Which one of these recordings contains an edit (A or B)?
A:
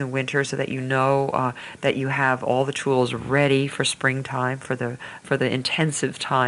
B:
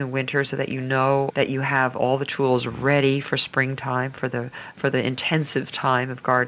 B